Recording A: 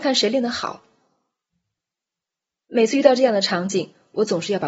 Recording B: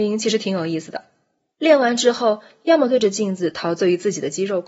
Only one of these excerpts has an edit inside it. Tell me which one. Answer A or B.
B